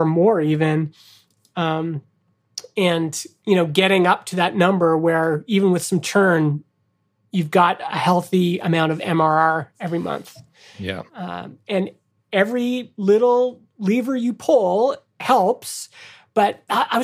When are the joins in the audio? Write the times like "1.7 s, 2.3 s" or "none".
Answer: 11.1 s

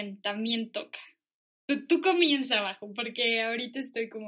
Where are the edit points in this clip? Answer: none

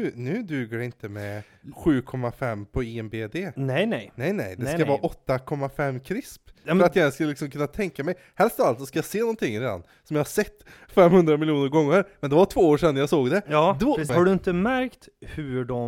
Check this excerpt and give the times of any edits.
14.1 s

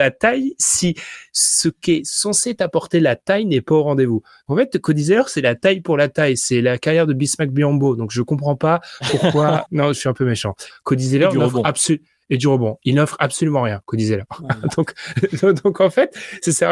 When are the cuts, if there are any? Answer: 9.7 s, 10.7 s

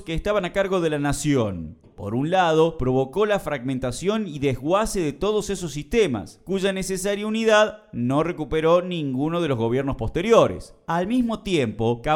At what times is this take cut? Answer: 1.8 s

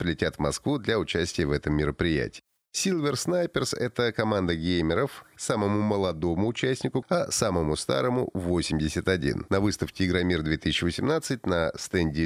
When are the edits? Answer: 7.0 s, 9.5 s

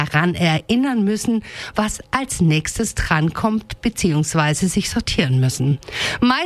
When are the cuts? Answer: none

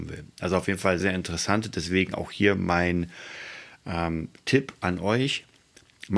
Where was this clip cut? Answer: 1.0 s

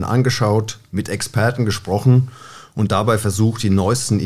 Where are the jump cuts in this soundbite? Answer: none

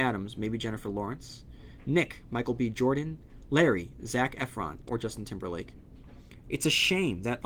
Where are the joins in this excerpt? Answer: 4.9 s, 6.4 s

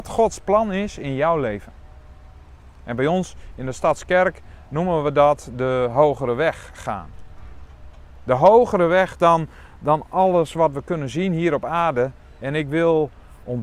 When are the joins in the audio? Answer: 12.4 s

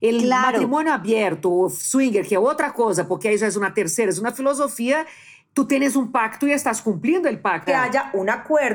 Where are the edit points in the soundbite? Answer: 7.7 s

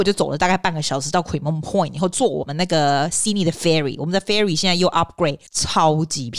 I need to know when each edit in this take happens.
5.5 s

